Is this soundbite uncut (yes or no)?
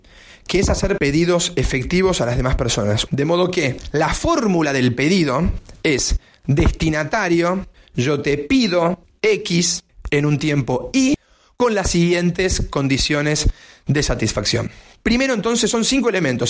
no